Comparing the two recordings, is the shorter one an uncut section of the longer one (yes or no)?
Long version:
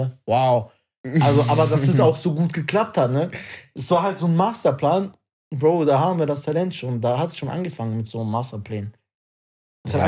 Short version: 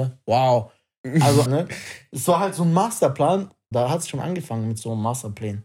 no